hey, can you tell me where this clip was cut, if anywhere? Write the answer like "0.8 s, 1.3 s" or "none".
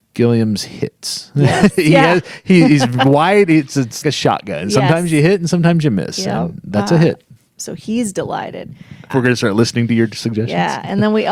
4.0 s, 7.6 s, 9.1 s